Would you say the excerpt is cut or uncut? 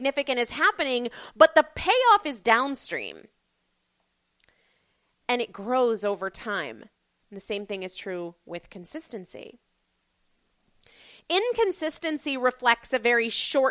uncut